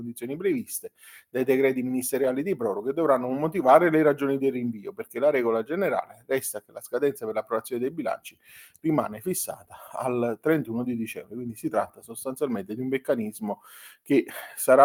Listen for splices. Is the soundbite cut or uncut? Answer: uncut